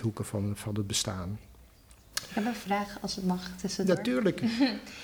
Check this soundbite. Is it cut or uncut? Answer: uncut